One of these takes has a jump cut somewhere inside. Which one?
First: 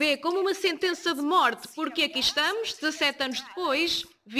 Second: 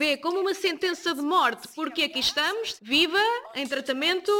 second; 1 cut; at 2.8 s

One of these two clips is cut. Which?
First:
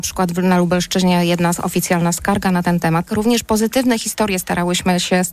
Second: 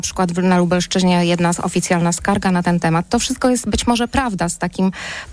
first; 1 cut; at 3.1 s

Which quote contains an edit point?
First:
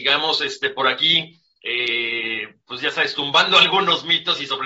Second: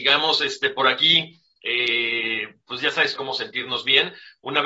second; 1 cut; at 3.2 s

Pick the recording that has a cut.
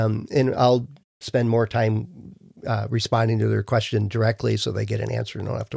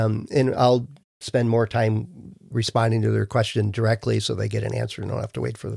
second; 1 cut; at 2.5 s

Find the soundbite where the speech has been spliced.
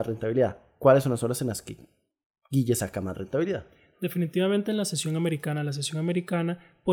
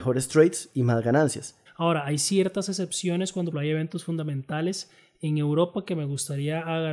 second; 2 cuts; at 1.7 s, 3.5 s

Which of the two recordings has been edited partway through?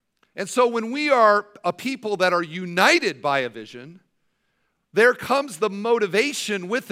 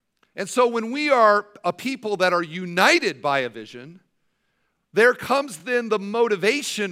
first; 1 cut; at 5.6 s

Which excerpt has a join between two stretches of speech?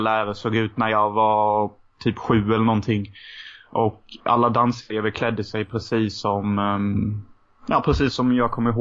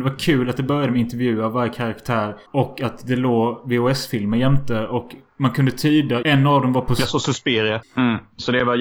second; 3 cuts; at 2.5 s, 6.2 s, 7.8 s

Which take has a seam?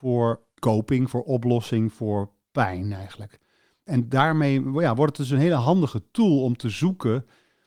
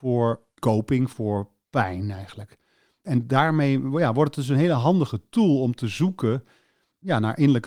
second; 1 cut; at 1.1 s

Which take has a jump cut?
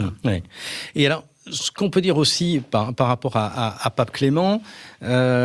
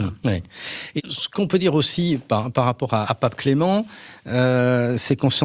second; 2 cuts; at 1.0 s, 3.0 s

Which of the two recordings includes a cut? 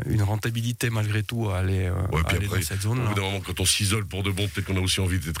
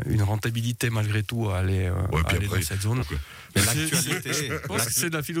second; 1 cut; at 3.0 s

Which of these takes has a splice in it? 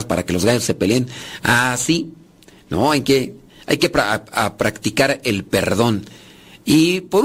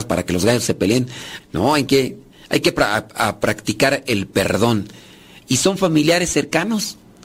second; 2 cuts; at 1.4 s, 5.4 s

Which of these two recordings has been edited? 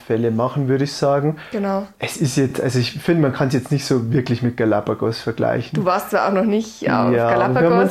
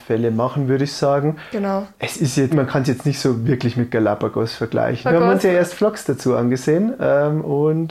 second; 2 cuts; at 2.5 s, 5.0 s

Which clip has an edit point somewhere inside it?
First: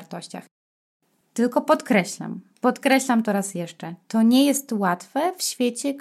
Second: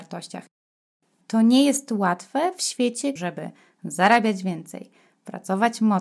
second; 2 cuts; at 1.2 s, 3.2 s

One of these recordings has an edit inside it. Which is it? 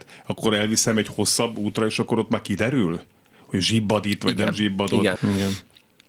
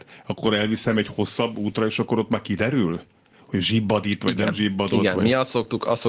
first; 1 cut; at 5.2 s

